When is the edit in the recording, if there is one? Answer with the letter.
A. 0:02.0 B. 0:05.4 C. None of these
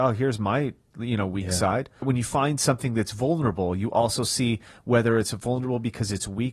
A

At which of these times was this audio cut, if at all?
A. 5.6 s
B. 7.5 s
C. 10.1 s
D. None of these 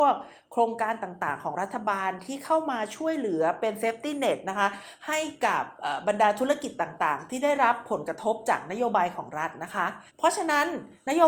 C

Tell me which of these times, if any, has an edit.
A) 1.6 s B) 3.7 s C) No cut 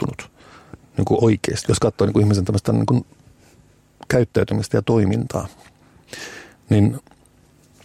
A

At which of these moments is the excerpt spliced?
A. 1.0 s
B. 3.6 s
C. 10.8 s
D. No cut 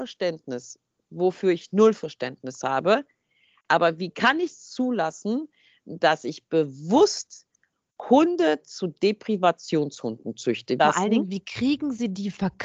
C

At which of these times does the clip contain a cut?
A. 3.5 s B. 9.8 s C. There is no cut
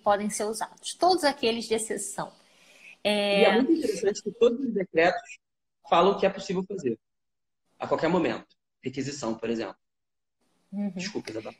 C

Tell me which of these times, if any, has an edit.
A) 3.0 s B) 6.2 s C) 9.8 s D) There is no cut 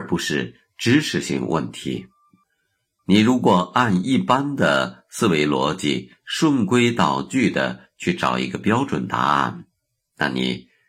A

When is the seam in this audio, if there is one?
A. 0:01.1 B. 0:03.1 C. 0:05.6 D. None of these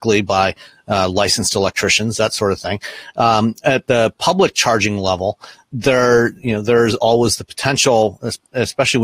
C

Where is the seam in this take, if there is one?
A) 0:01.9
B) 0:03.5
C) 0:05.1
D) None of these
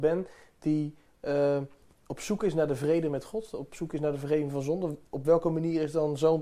A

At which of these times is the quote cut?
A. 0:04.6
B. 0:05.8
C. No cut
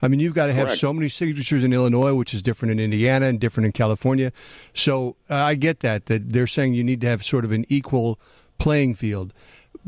A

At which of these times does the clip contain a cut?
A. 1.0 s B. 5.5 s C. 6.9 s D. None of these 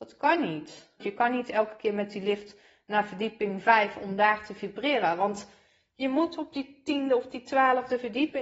A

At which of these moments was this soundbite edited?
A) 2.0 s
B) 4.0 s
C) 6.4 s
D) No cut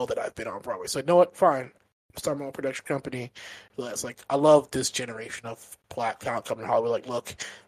D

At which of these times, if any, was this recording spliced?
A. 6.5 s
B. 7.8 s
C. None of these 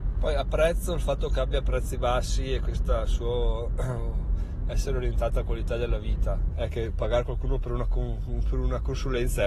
A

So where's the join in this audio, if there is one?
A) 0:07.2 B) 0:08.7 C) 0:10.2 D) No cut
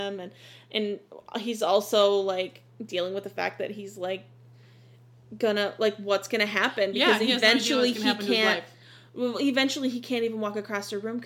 D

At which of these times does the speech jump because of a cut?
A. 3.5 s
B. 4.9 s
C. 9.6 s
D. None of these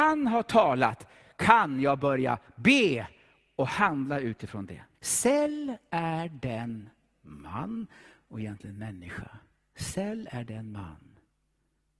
B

